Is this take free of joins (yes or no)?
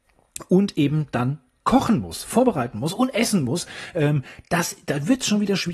yes